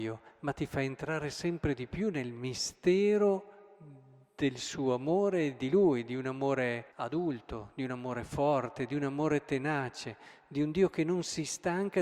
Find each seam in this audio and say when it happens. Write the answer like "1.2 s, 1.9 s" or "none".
6.9 s